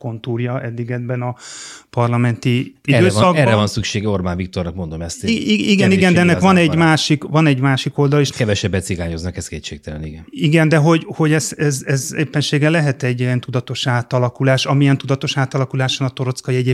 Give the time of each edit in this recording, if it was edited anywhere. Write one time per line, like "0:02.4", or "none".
0:08.3
0:11.0